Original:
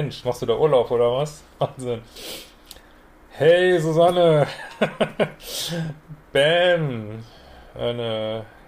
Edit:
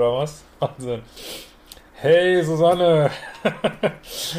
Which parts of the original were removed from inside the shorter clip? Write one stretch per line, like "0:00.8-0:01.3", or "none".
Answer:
0:02.9-0:03.2